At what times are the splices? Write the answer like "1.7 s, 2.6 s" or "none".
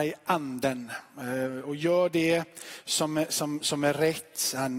3.3 s